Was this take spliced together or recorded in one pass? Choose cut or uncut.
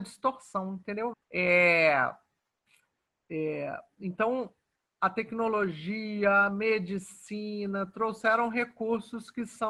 cut